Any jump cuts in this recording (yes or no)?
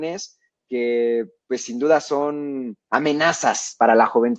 no